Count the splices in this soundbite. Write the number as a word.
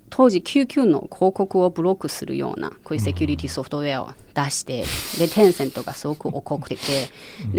one